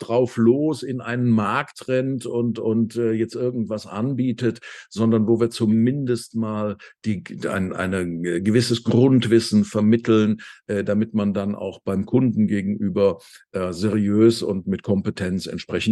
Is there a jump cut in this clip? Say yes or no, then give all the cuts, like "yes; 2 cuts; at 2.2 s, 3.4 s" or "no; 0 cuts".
yes; 1 cut; at 14.6 s